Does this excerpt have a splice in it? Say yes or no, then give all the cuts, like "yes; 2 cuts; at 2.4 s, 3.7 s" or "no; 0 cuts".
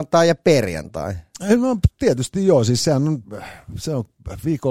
no; 0 cuts